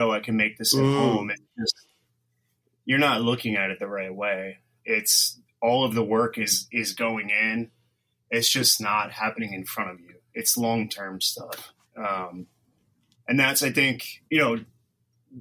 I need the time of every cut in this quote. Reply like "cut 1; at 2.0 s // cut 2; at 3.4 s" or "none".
cut 1; at 14.3 s